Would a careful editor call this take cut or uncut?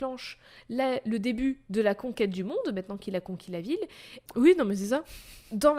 cut